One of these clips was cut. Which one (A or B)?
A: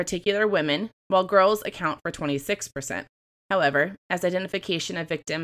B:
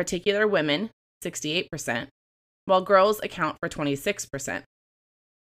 A